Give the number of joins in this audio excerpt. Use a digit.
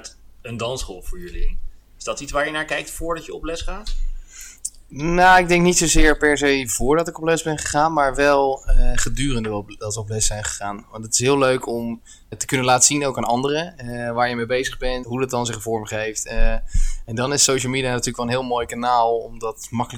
2